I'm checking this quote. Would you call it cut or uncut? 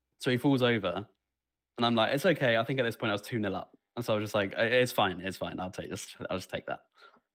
uncut